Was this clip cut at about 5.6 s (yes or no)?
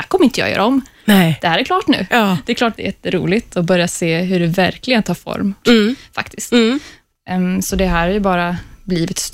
yes